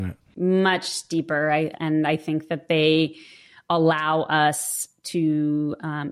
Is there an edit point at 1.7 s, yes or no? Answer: yes